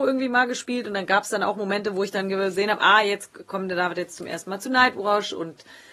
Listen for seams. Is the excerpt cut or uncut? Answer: uncut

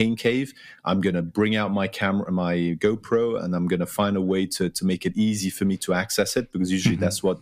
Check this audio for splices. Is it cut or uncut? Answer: uncut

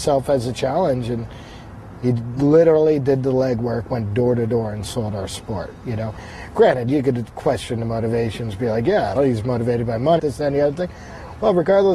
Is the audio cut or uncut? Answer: cut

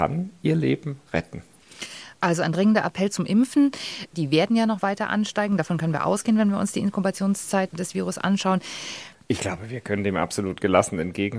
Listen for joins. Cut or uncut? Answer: cut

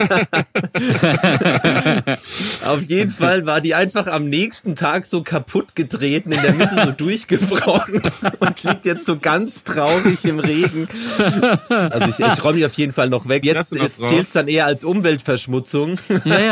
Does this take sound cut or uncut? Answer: cut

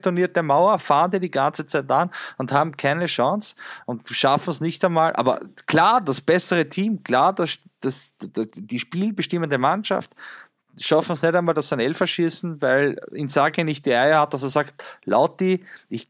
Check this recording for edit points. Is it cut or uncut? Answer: uncut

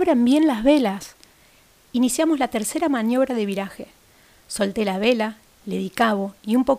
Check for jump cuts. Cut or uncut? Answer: uncut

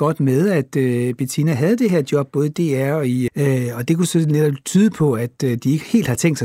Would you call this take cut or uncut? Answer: cut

